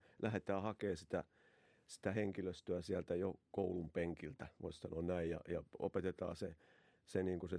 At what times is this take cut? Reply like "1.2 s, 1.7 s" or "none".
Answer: none